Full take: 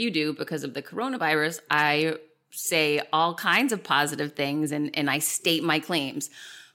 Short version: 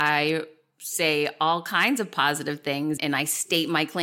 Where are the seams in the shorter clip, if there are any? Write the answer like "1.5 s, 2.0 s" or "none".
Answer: 3.0 s